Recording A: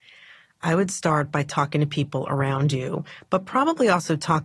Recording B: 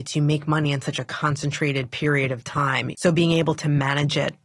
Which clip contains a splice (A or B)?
B